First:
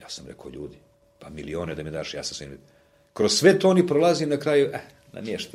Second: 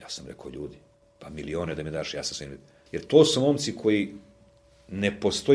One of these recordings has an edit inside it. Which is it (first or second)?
second